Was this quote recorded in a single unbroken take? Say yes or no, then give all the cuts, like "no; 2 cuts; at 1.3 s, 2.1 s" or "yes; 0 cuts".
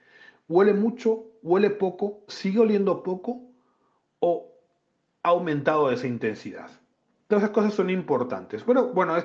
no; 1 cut; at 2.3 s